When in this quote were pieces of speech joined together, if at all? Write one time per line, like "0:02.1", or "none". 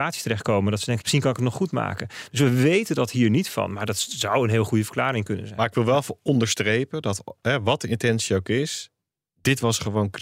0:01.0